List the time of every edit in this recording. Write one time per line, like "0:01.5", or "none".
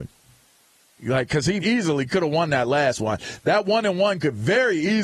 0:01.6